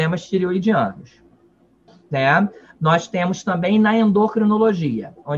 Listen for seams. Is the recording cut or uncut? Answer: cut